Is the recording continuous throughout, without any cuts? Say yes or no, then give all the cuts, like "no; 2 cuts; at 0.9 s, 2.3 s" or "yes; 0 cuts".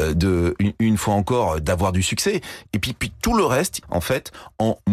no; 2 cuts; at 2.7 s, 3.8 s